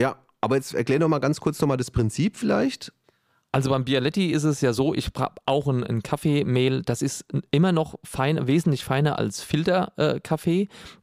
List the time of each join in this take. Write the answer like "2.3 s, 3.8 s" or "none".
none